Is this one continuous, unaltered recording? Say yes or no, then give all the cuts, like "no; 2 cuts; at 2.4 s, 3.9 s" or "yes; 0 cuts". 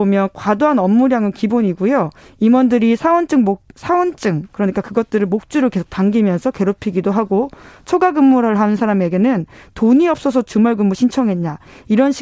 yes; 0 cuts